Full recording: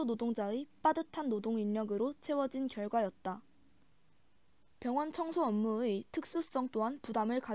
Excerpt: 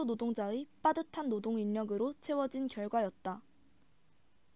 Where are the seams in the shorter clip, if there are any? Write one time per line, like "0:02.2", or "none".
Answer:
none